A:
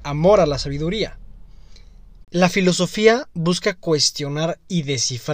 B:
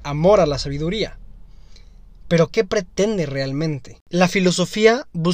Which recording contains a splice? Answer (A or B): A